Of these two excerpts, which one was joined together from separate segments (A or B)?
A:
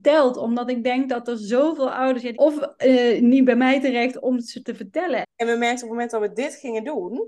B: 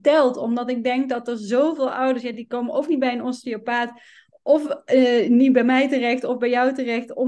A